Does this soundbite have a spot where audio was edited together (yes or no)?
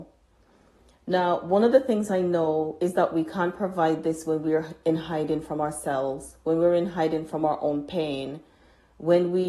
no